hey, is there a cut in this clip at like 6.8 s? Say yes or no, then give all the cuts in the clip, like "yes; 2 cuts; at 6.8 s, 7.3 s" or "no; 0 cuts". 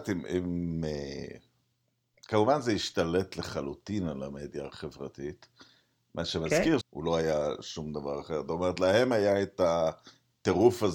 yes; 1 cut; at 6.8 s